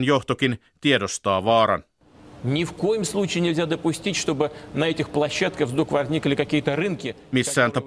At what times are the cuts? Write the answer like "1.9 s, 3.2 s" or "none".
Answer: none